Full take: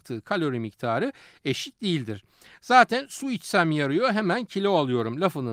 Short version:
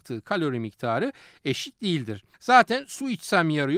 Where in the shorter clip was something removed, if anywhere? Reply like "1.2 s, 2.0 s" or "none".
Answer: 2.3 s